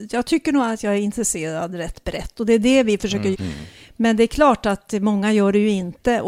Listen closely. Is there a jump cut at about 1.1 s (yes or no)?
no